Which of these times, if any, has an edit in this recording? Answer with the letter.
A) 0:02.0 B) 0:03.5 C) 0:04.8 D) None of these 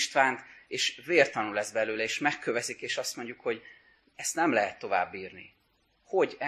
D